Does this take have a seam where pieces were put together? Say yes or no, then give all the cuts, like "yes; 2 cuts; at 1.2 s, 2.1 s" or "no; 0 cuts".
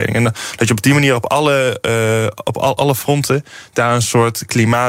yes; 1 cut; at 2.8 s